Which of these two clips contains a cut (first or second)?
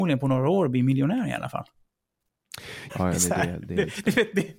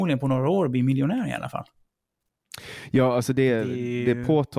first